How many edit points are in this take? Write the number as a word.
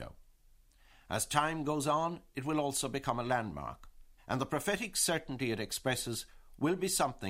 one